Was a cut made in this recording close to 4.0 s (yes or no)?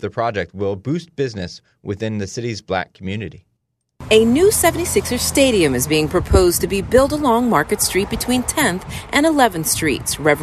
no